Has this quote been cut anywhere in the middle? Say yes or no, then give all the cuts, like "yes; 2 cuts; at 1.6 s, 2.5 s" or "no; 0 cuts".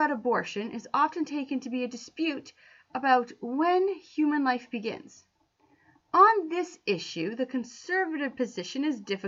no; 0 cuts